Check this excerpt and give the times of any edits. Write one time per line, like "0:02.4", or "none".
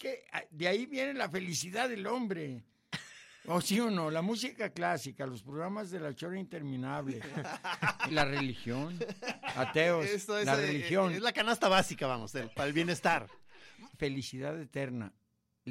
0:08.1
0:13.9

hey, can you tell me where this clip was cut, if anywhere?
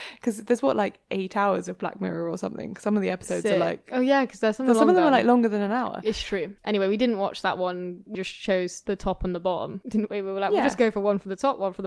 0:08.1

